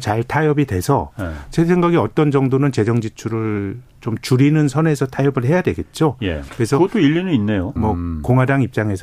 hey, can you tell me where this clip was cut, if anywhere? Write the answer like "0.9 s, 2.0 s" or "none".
6.5 s, 7.8 s